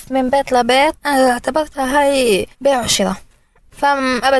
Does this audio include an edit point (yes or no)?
yes